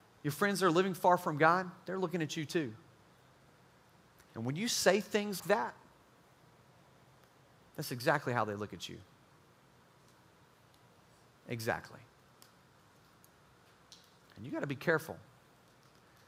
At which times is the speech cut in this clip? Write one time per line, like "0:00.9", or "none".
0:05.4